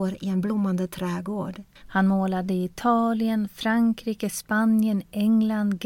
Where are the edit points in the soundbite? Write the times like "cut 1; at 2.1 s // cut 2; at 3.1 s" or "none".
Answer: cut 1; at 1.8 s